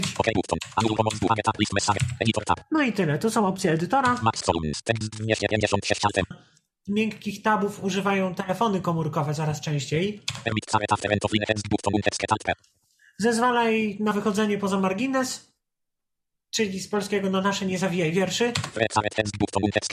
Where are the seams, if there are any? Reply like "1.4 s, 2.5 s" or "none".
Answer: 6.3 s